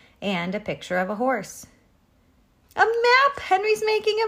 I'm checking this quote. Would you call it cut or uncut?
cut